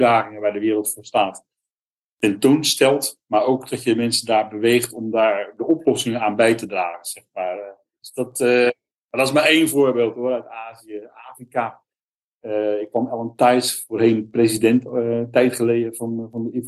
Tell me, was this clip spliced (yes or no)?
yes